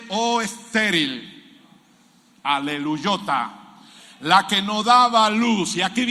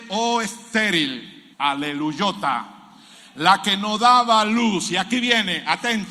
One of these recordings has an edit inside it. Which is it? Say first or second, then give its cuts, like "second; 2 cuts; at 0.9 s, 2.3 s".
second; 1 cut; at 1.5 s